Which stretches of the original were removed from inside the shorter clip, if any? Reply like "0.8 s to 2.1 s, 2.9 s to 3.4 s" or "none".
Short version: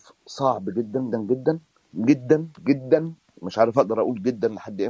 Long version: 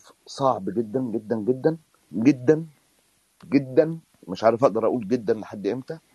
1.1 s to 1.3 s, 2.7 s to 3.4 s